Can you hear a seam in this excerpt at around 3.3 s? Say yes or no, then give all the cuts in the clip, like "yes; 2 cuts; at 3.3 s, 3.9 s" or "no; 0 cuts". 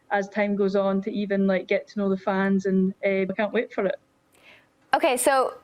yes; 1 cut; at 3.3 s